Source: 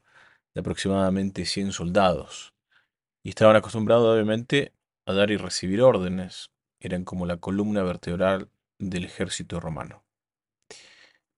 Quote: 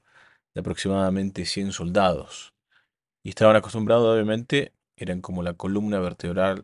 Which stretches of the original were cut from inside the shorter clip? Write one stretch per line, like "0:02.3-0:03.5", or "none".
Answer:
0:04.8-0:06.7